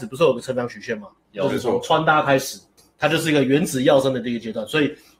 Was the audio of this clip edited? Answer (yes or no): yes